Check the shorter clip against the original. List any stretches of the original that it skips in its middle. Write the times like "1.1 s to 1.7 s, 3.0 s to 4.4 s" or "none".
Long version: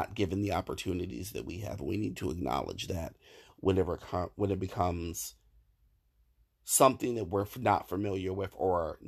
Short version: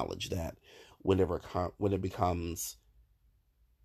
none